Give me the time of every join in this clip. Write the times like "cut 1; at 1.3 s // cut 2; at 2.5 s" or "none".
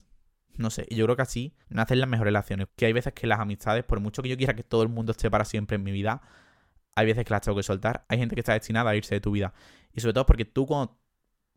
cut 1; at 1.6 s // cut 2; at 2.7 s // cut 3; at 8.0 s